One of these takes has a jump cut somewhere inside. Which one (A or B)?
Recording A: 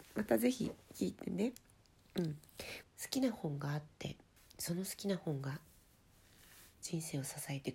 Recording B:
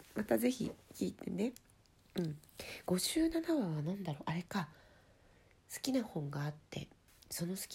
A